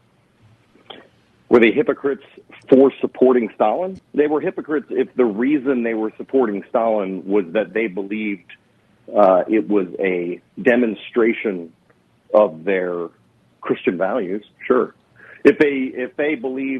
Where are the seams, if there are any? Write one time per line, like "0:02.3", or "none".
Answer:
0:04.0